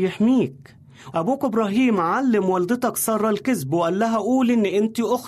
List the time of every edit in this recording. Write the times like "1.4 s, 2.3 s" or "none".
1.1 s